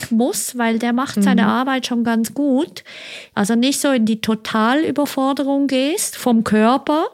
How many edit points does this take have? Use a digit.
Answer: 1